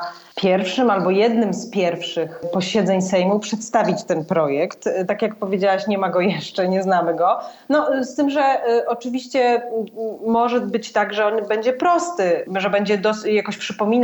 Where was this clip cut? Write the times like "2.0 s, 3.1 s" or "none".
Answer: none